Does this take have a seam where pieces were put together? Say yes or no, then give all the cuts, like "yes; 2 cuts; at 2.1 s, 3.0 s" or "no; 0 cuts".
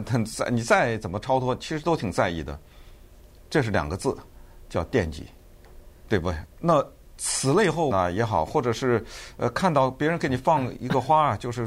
yes; 2 cuts; at 6.5 s, 7.9 s